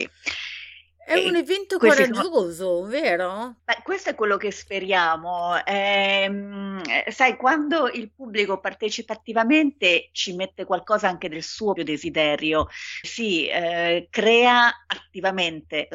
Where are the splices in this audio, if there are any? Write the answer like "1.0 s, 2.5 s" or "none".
3.6 s, 11.8 s, 13.0 s